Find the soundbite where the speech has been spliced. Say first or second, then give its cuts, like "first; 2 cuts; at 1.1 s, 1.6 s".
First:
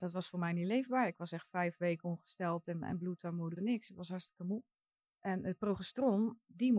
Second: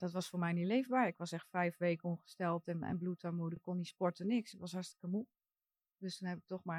first; 2 cuts; at 3.6 s, 5.0 s